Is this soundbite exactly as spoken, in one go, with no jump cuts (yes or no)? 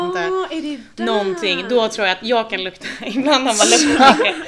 yes